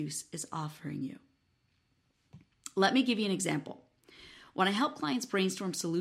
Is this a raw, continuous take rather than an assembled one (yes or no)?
yes